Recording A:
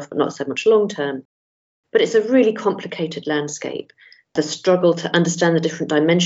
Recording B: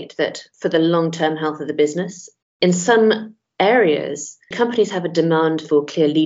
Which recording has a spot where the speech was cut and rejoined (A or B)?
B